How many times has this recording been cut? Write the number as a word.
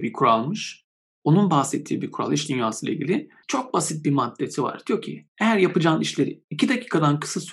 zero